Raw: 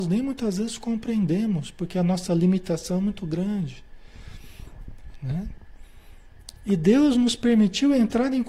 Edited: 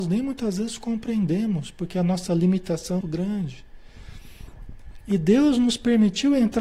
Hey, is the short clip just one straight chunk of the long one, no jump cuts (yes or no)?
no